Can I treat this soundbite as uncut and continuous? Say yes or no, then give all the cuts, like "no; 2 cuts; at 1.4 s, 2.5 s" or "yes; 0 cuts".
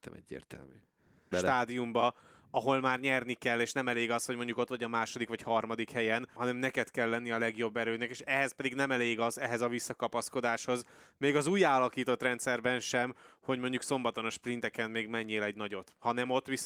no; 2 cuts; at 1.3 s, 6.4 s